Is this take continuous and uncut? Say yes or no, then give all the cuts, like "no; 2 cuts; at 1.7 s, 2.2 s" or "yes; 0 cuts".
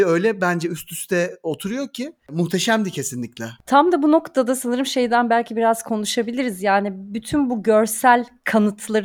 no; 1 cut; at 3.6 s